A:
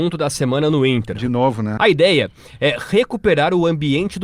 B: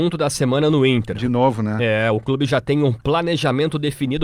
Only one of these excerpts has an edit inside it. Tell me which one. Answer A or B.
A